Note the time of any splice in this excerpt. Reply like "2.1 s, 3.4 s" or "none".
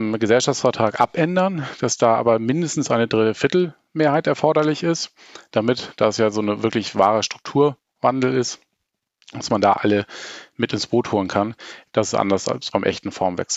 11.9 s